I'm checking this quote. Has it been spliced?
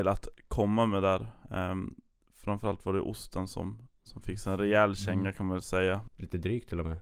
yes; 1 cut; at 6.1 s

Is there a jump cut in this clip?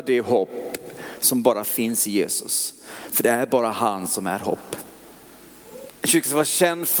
yes; 1 cut; at 5.9 s

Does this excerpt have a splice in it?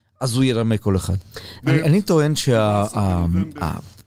yes; 1 cut; at 1.6 s

